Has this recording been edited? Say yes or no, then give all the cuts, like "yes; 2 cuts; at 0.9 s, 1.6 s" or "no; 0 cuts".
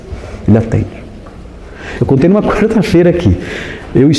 yes; 1 cut; at 2.0 s